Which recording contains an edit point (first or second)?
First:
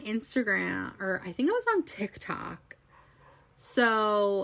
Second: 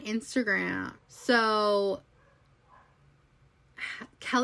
second